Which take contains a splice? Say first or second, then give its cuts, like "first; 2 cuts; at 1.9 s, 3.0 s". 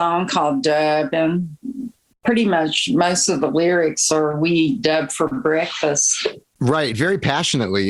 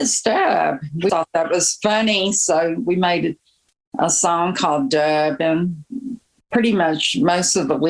second; 1 cut; at 1.1 s